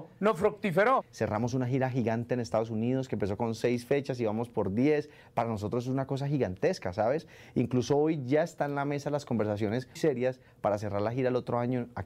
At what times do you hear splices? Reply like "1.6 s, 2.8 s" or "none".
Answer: 1.0 s, 10.0 s